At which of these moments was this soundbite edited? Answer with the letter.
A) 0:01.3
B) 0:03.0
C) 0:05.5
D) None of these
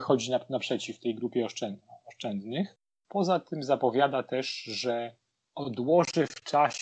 D